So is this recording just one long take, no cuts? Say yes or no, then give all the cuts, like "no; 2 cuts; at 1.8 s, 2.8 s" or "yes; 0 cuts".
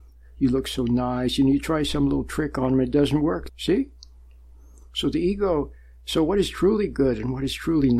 no; 1 cut; at 3.5 s